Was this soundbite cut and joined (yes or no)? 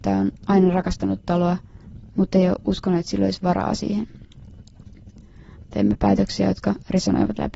yes